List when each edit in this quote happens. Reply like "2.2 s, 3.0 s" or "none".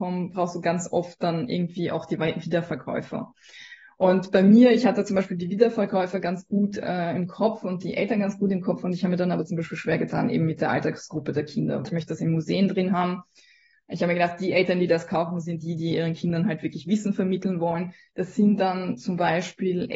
11.8 s, 18.1 s